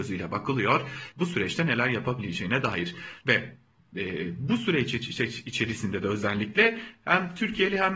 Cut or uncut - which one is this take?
cut